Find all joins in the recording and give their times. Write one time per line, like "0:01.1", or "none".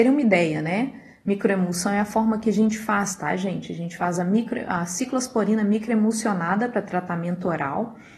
none